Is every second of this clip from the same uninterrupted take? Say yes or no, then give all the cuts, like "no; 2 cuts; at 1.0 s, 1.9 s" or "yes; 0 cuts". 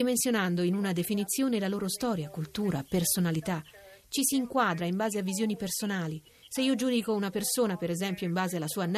yes; 0 cuts